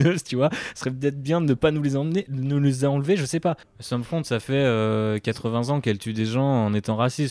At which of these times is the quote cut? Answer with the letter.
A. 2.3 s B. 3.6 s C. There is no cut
B